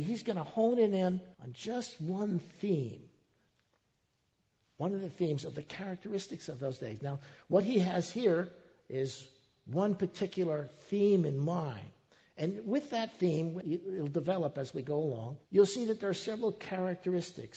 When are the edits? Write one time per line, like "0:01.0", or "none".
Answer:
0:01.3
0:13.6
0:15.4